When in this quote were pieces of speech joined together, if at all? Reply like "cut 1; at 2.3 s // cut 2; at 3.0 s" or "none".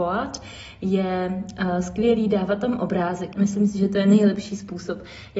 cut 1; at 3.3 s